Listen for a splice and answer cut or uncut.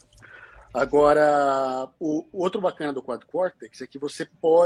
uncut